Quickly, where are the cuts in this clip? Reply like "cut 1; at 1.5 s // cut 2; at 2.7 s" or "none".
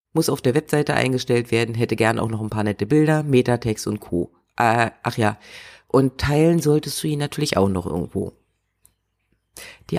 none

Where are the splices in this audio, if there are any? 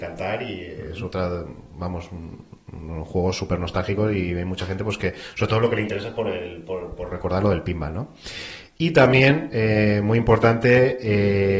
none

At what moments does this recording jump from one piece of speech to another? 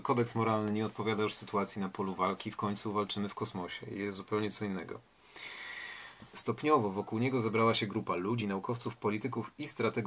cut 1; at 6.3 s // cut 2; at 8.4 s

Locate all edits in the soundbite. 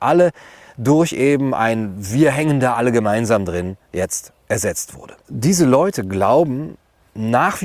cut 1; at 5.2 s

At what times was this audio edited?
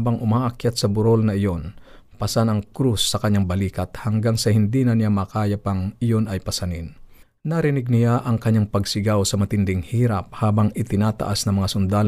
cut 1; at 7.4 s

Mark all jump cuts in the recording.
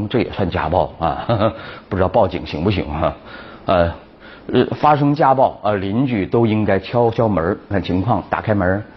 cut 1; at 7.7 s

